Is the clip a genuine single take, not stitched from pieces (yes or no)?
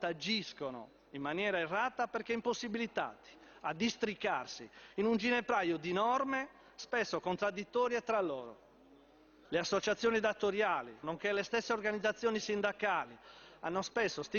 no